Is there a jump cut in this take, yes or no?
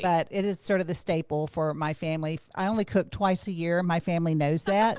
no